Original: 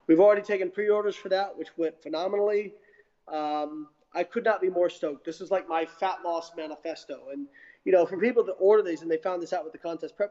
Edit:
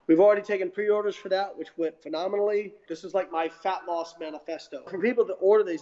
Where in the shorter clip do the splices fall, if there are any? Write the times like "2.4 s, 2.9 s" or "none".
2.9 s, 4.9 s